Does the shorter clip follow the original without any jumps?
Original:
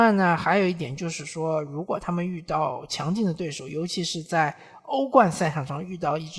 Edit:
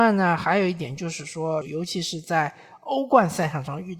no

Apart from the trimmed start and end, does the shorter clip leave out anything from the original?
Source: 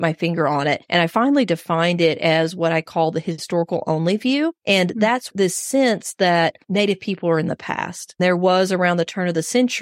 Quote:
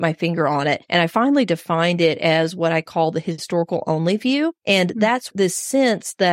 no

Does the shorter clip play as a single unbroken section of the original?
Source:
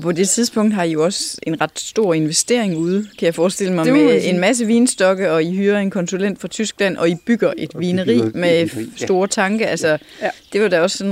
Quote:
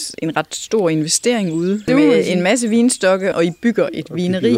no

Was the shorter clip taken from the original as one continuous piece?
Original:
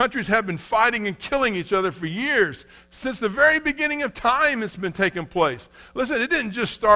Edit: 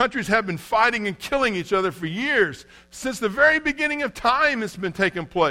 yes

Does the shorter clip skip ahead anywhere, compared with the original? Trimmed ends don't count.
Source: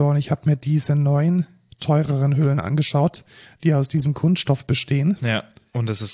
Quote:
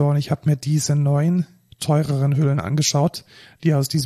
no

